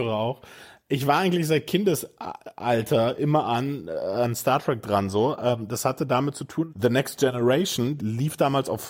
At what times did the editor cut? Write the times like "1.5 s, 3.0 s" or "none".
6.7 s, 8.0 s

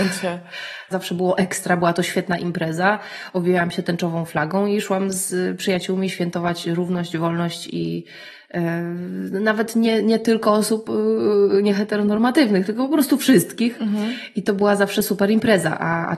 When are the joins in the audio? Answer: 0.9 s

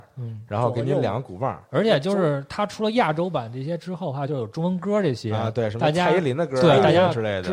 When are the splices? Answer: none

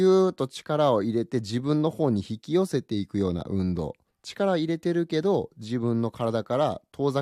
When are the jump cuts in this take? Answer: 4.1 s

